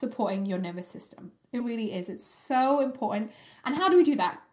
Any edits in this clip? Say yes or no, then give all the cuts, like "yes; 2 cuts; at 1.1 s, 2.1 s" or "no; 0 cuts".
yes; 1 cut; at 1.6 s